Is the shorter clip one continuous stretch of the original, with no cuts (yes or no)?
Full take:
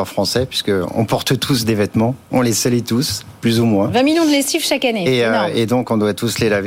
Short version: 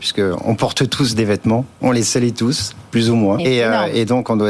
no